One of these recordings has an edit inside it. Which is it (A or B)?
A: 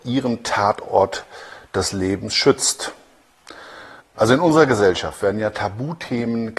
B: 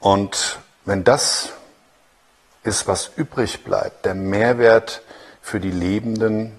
A